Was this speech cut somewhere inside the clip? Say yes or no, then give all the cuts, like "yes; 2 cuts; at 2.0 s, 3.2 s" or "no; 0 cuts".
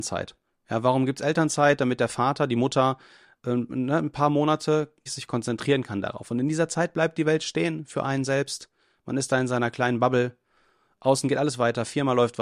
yes; 1 cut; at 5.1 s